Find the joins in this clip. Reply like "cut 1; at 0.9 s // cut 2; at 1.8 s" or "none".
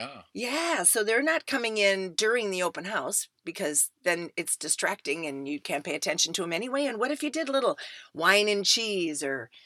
none